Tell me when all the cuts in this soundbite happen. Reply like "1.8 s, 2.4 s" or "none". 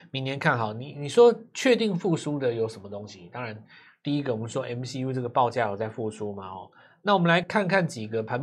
none